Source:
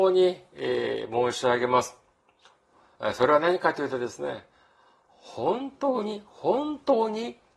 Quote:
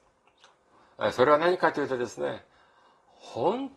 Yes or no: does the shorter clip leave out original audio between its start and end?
no